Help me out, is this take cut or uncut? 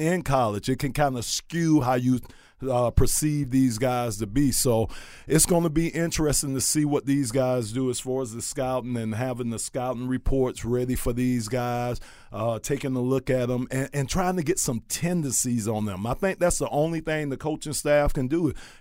uncut